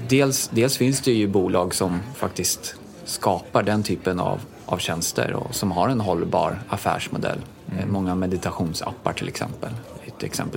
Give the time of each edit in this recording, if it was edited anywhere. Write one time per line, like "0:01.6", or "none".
none